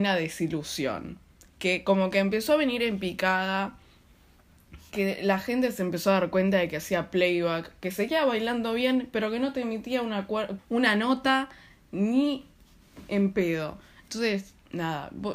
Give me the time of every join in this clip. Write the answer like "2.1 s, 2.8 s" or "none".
10.6 s